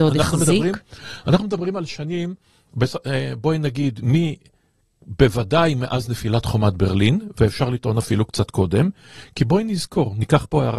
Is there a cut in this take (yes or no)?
no